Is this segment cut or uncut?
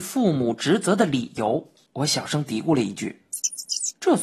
cut